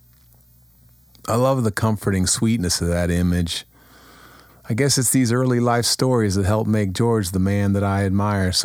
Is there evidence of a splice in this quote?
yes; 1 cut; at 4.5 s

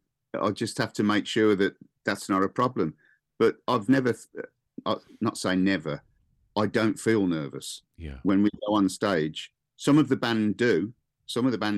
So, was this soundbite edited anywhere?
yes; 1 cut; at 4.8 s

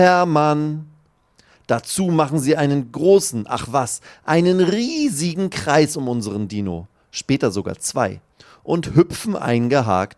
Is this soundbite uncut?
yes; 0 cuts

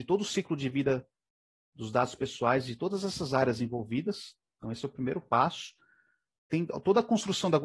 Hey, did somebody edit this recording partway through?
no; 0 cuts

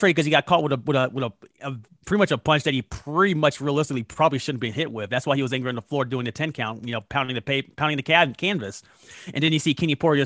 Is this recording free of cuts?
yes; 0 cuts

